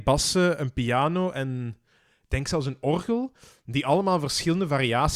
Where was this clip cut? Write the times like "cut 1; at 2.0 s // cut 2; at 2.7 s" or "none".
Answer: none